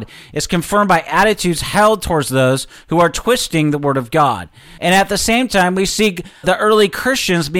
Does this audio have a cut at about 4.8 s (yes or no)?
yes